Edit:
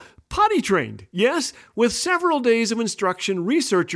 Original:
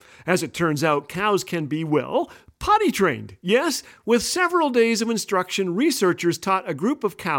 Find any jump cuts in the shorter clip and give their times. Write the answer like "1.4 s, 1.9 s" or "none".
none

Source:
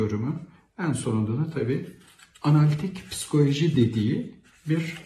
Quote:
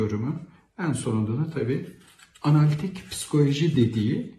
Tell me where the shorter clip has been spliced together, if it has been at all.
none

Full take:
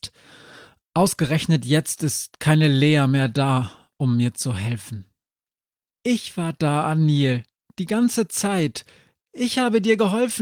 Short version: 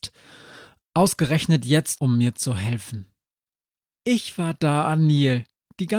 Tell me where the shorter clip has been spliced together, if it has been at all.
2.0 s

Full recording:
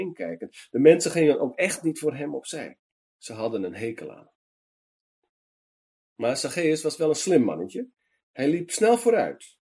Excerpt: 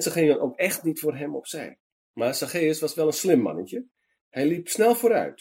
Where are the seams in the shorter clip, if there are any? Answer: 2.0 s

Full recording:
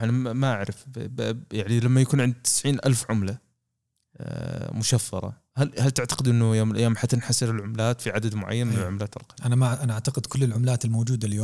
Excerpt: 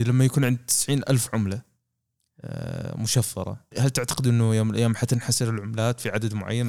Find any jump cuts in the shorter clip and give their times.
3.7 s

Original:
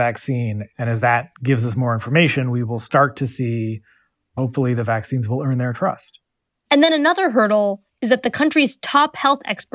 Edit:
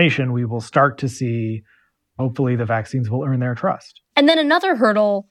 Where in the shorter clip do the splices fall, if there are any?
4.1 s

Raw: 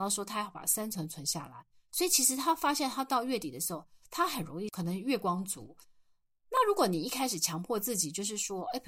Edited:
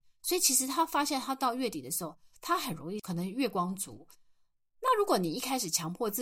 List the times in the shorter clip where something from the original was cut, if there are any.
none

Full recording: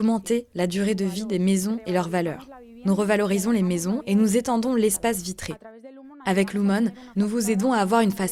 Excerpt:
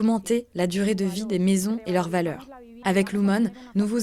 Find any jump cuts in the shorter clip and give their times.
2.8 s

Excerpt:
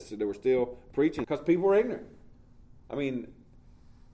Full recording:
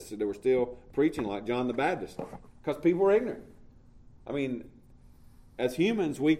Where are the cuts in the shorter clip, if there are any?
1.2 s

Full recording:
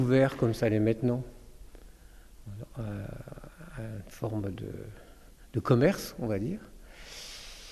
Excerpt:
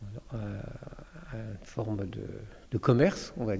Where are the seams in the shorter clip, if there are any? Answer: 2.6 s

